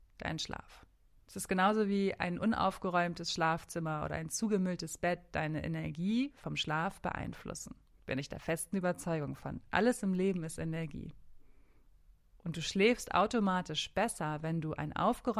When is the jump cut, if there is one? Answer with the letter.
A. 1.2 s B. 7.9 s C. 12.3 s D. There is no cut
A